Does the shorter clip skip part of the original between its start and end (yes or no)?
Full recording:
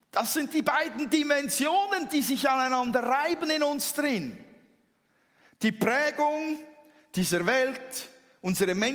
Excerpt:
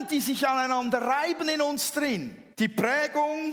yes